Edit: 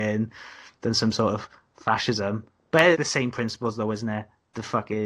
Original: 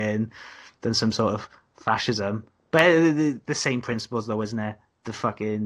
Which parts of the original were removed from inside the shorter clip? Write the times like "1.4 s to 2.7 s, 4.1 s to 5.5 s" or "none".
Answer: 2.9 s to 3.4 s